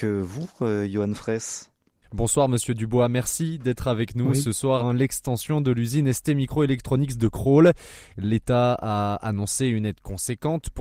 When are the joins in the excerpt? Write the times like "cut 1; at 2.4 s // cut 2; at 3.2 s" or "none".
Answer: cut 1; at 4.8 s